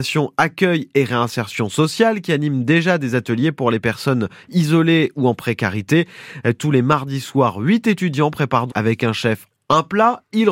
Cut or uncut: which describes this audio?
cut